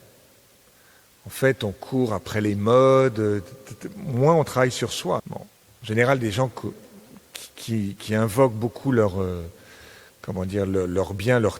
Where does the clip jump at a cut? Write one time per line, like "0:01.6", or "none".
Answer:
0:05.2